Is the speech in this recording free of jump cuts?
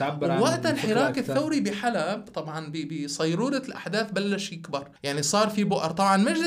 no; 1 cut; at 5.0 s

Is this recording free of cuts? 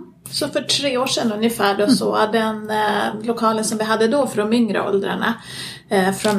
yes; 0 cuts

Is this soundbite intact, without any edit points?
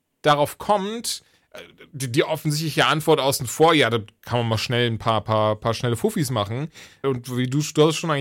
no; 1 cut; at 7.0 s

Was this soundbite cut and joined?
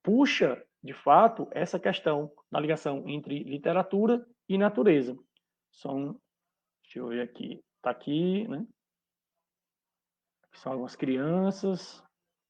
no; 0 cuts

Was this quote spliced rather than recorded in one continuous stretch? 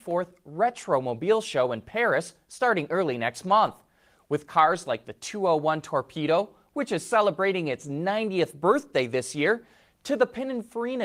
no; 0 cuts

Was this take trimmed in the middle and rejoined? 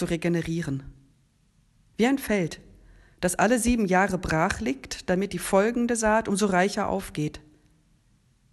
no; 0 cuts

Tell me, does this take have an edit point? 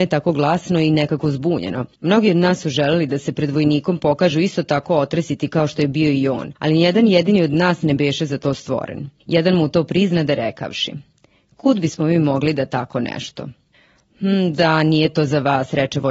no; 0 cuts

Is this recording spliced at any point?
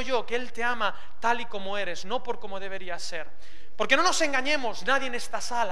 no; 0 cuts

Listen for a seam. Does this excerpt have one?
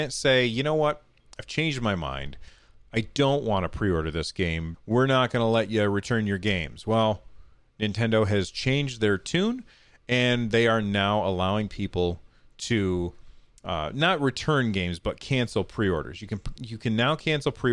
yes; 1 cut; at 4.7 s

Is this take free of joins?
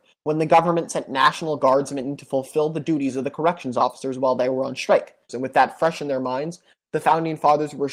no; 1 cut; at 5.3 s

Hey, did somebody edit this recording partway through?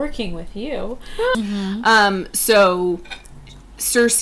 yes; 1 cut; at 1.3 s

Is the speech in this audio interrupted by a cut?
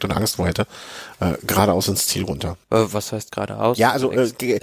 yes; 1 cut; at 2.6 s

